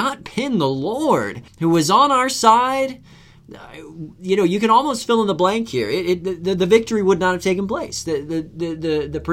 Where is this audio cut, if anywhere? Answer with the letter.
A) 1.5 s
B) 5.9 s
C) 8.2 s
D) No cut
A